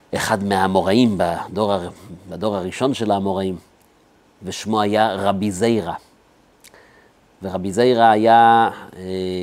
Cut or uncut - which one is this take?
uncut